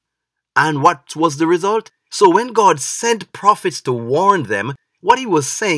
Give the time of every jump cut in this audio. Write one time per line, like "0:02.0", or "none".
0:01.9